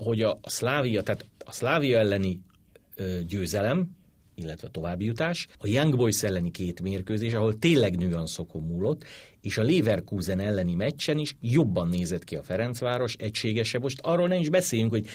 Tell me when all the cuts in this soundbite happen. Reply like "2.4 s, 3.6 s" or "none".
5.5 s